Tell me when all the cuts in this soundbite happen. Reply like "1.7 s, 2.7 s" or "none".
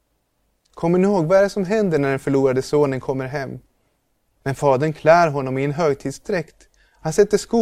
4.4 s

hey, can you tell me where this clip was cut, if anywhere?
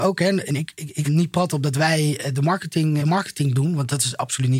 1.0 s, 3.0 s

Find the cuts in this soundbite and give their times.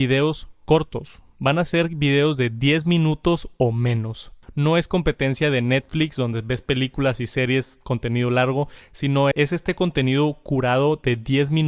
4.4 s, 9.3 s

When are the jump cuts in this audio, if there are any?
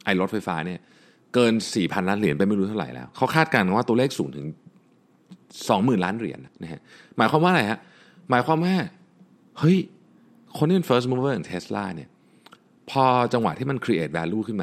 6.5 s

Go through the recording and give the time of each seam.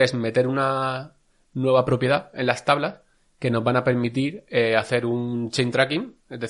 none

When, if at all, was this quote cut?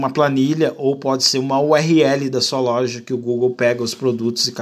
none

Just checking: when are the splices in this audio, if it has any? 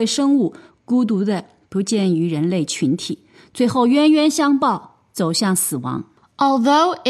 none

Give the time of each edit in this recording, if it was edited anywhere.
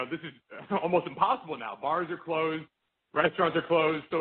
none

